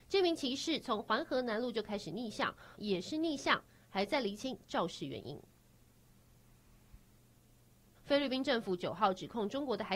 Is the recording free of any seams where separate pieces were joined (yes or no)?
no